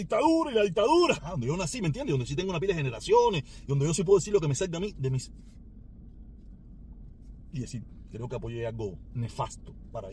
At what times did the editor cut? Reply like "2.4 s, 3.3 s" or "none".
1.2 s, 7.5 s

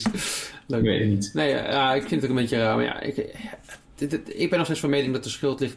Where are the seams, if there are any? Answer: none

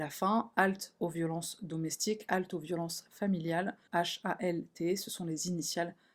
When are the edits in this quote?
3.9 s

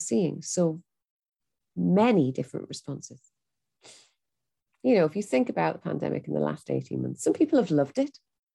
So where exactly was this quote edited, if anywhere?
none

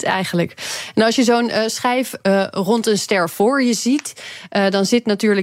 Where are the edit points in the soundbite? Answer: none

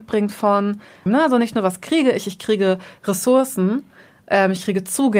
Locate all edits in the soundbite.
1.1 s

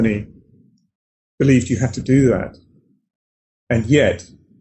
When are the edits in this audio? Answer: none

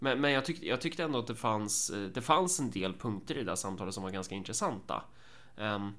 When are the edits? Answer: none

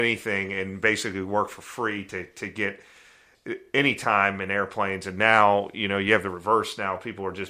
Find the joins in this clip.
none

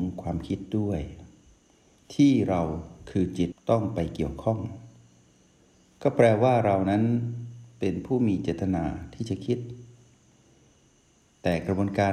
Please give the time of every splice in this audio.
3.5 s

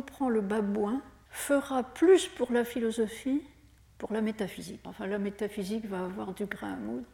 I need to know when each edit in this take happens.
1.3 s, 4.8 s

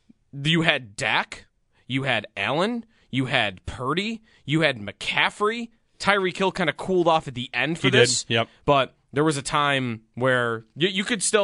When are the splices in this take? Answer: none

